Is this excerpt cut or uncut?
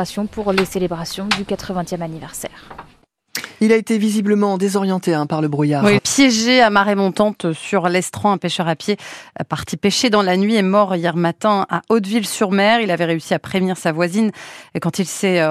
cut